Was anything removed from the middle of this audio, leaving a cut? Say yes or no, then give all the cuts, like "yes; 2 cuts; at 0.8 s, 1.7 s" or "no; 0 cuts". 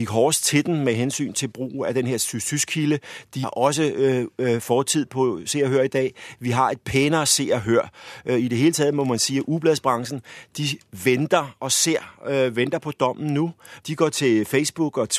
yes; 2 cuts; at 3.4 s, 13.8 s